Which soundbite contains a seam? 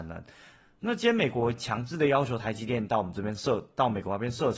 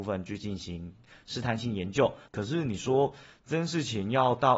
second; 1 cut; at 2.3 s

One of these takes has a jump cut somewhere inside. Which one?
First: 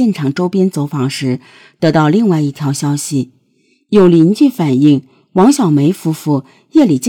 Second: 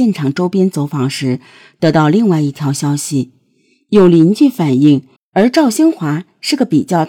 second; 1 cut; at 5.2 s

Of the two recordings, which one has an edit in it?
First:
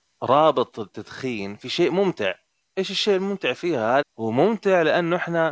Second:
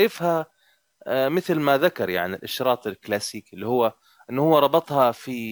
first; 1 cut; at 4.0 s

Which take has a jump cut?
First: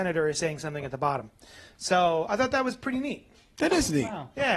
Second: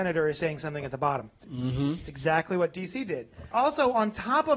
second; 2 cuts; at 1.4 s, 3.5 s

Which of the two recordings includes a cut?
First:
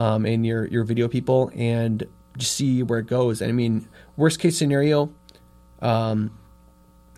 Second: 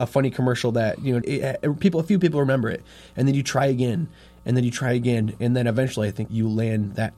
second; 2 cuts; at 1.2 s, 6.3 s

